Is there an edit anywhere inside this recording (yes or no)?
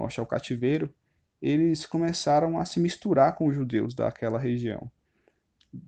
no